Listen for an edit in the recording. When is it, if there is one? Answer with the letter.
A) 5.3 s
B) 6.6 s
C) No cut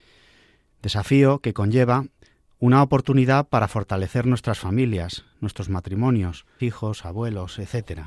B